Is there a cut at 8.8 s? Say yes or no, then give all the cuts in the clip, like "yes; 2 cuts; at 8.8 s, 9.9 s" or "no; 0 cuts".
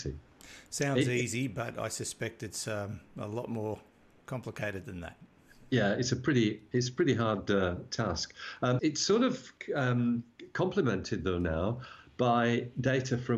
yes; 1 cut; at 8.8 s